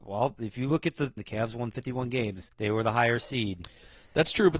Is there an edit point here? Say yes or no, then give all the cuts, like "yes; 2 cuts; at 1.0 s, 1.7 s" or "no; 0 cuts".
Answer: yes; 2 cuts; at 1.2 s, 2.5 s